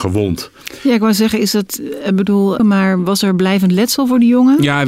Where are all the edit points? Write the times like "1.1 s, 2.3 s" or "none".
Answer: 2.6 s